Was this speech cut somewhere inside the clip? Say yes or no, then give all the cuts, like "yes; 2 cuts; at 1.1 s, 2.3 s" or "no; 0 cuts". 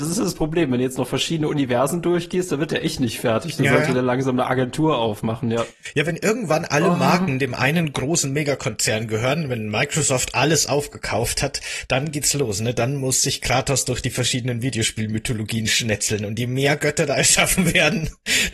no; 0 cuts